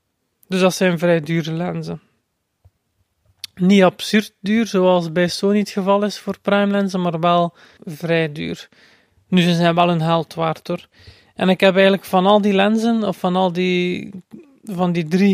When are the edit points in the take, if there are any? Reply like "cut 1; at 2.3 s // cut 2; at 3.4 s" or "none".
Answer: cut 1; at 7.8 s